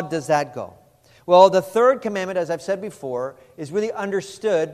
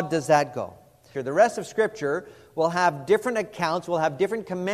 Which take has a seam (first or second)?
second